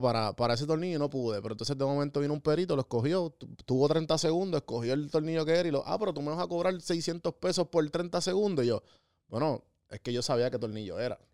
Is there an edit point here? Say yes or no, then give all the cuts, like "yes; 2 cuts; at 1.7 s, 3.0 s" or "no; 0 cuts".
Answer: no; 0 cuts